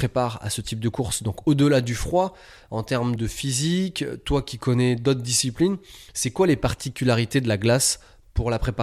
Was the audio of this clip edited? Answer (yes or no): yes